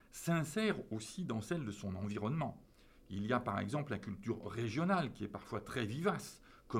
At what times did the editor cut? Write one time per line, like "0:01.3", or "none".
none